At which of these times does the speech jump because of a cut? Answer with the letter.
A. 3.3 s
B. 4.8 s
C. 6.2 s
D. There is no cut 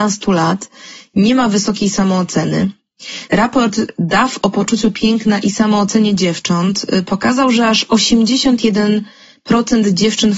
A